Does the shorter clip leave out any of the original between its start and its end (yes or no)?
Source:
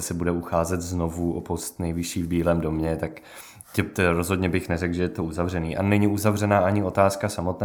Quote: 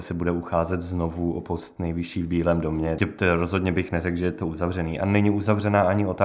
yes